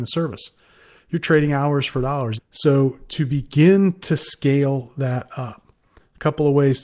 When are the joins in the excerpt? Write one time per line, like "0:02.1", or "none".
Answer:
0:02.4